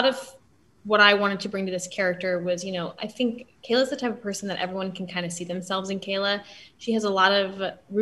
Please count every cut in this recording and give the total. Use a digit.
0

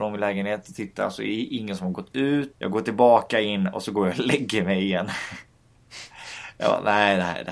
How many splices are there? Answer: 1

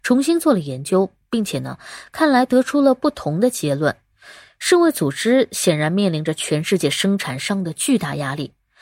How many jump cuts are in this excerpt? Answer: 0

